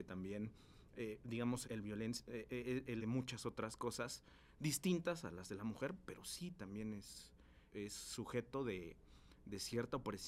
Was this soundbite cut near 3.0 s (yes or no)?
yes